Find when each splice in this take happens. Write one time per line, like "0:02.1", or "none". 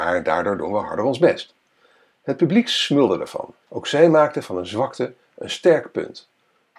0:03.6